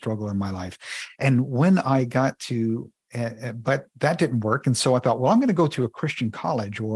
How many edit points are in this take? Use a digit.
0